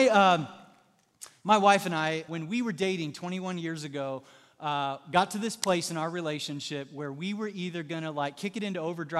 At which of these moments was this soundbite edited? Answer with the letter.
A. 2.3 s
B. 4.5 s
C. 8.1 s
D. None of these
A